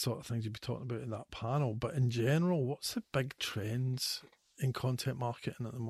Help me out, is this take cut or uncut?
uncut